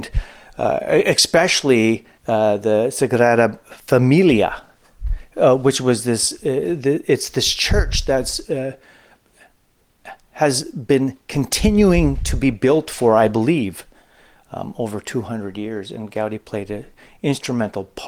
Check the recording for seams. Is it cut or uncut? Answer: cut